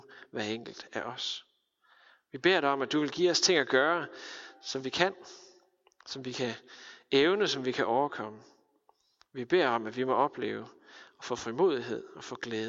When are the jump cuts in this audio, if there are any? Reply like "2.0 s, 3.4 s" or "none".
none